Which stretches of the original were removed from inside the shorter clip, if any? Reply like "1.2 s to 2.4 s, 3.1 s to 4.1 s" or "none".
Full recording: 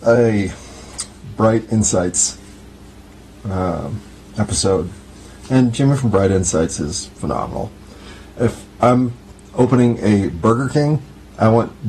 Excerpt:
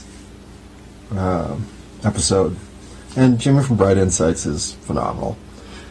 none